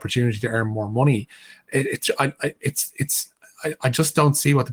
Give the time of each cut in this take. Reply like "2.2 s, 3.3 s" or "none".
none